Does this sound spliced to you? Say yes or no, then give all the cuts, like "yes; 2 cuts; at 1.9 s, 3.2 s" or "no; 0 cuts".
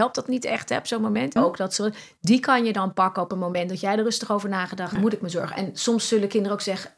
yes; 2 cuts; at 1.4 s, 5.0 s